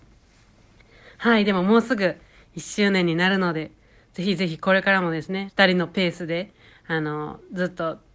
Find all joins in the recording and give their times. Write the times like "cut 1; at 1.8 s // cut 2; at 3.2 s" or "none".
cut 1; at 5.5 s